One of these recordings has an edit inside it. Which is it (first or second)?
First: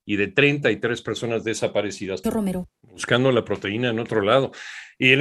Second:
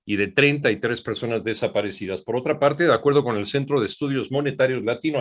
first